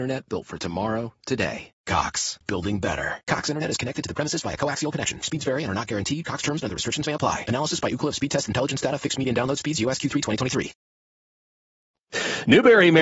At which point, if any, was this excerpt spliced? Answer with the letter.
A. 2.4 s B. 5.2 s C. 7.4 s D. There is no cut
A